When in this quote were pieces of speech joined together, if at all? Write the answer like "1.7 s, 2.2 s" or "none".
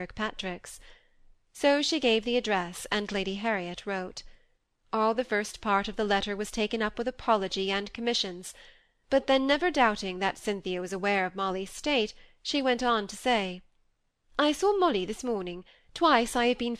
none